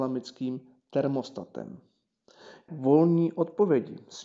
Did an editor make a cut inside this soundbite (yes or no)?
yes